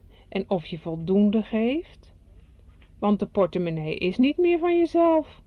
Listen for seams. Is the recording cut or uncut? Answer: uncut